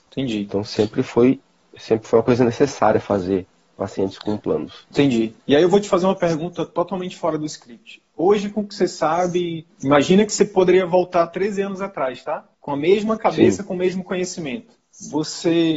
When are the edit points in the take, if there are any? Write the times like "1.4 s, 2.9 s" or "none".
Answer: none